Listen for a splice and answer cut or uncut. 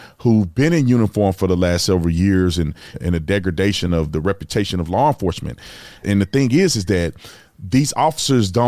cut